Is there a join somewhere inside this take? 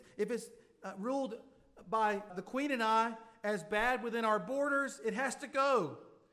yes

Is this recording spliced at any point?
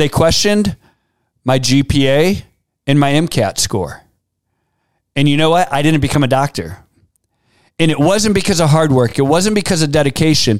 no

